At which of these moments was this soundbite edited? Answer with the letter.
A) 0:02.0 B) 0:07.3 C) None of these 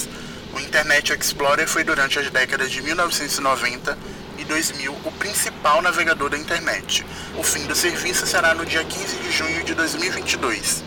B